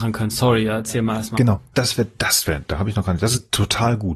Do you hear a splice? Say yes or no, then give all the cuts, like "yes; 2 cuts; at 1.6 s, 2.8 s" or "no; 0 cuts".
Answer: yes; 1 cut; at 1.7 s